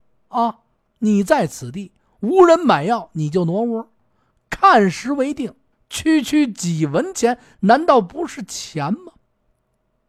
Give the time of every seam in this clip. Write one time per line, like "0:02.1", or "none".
0:05.7